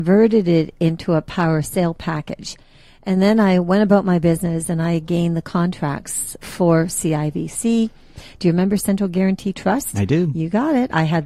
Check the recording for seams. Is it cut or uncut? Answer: uncut